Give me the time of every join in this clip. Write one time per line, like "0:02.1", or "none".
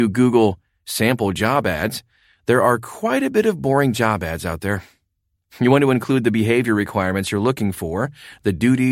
none